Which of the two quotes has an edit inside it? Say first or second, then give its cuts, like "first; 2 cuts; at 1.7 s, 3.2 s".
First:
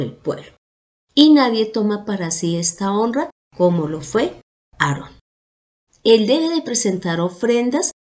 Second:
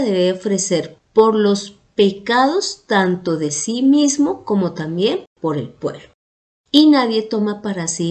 first; 2 cuts; at 3.4 s, 5.9 s